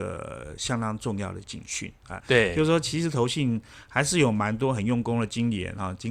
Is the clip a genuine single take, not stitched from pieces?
no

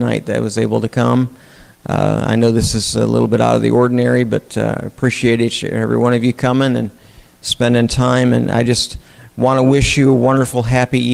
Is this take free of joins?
yes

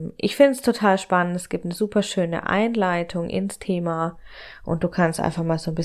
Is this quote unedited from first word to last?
yes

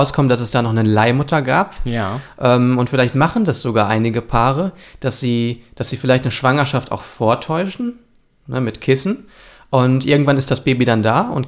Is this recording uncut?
yes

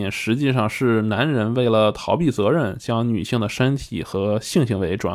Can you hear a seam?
no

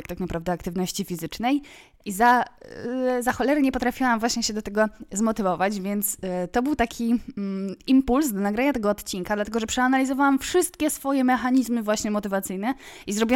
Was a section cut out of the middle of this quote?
yes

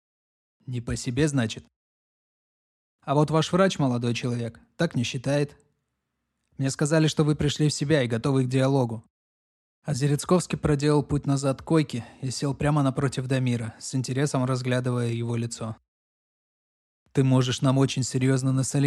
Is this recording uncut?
yes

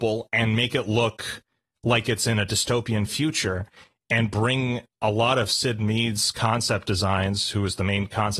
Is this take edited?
no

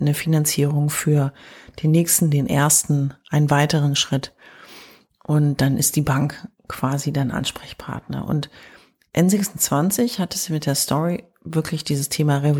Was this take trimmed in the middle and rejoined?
no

